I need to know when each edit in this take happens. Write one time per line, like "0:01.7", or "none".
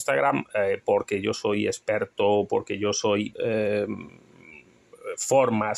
0:03.3